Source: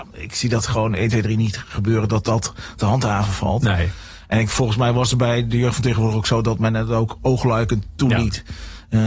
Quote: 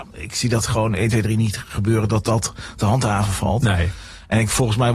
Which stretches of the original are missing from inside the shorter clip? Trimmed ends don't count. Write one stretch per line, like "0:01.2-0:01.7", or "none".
none